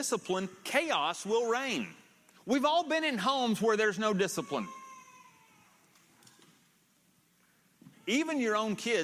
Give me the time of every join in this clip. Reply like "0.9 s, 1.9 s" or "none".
7.9 s